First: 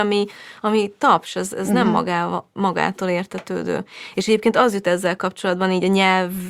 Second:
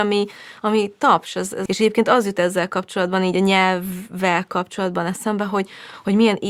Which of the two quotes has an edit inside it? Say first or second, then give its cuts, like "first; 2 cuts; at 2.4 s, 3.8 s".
second; 1 cut; at 1.7 s